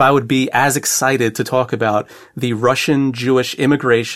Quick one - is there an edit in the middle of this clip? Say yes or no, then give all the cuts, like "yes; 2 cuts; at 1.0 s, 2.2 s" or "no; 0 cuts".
no; 0 cuts